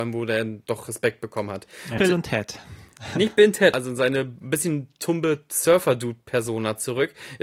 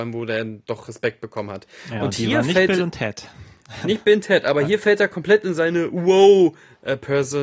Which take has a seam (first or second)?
first